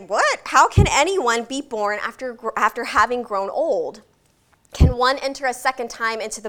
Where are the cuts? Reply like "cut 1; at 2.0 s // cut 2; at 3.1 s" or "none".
none

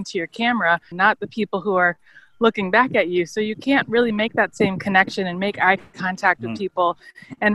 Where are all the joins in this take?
cut 1; at 0.9 s

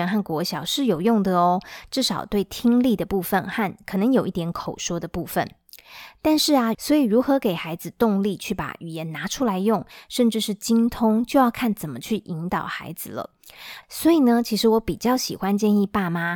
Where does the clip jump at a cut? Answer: cut 1; at 6.7 s // cut 2; at 13.8 s

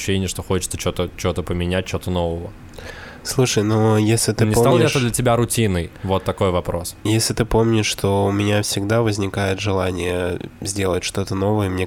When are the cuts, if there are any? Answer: none

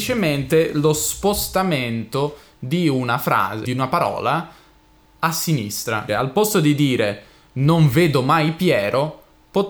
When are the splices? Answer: cut 1; at 3.6 s // cut 2; at 6.1 s

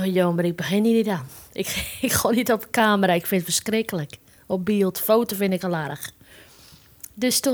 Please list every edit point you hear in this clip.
none

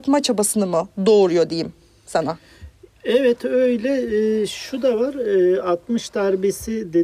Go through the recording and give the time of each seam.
none

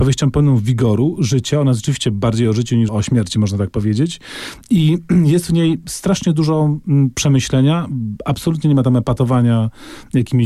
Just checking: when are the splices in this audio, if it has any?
cut 1; at 2.9 s

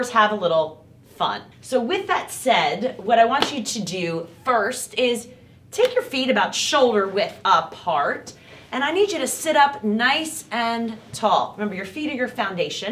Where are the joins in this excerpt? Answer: cut 1; at 1.5 s

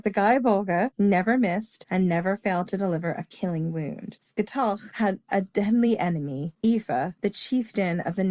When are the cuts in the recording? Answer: none

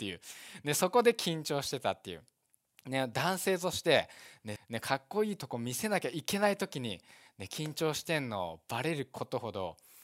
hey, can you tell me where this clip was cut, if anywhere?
cut 1; at 4.6 s

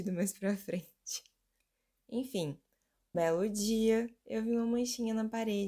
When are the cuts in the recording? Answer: cut 1; at 3.1 s

